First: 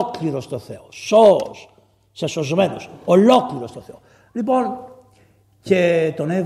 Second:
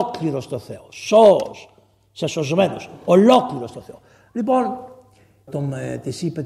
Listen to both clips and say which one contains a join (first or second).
second